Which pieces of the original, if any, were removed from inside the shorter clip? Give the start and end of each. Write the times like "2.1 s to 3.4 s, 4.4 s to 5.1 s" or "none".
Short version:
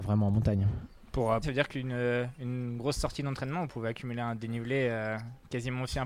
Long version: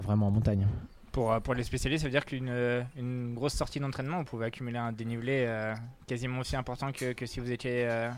1.4 s to 2.0 s